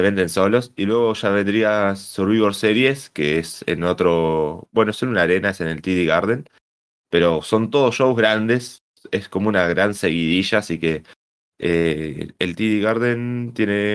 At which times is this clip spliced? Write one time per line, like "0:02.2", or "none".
none